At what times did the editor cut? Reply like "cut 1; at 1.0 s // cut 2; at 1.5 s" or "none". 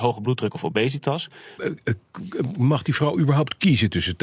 cut 1; at 1.6 s